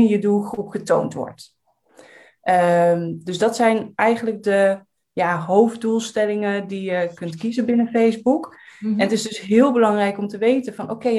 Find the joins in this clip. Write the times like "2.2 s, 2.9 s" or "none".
none